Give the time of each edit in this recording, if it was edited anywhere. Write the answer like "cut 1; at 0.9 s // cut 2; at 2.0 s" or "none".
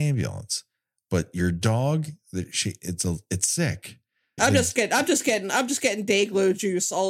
cut 1; at 4.4 s